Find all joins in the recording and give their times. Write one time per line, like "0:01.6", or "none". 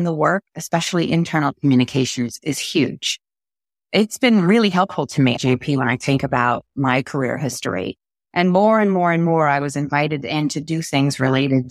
0:05.4
0:08.2